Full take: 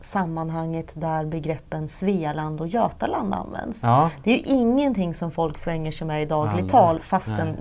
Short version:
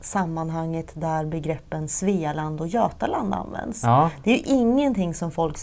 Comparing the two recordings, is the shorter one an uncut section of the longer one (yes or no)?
yes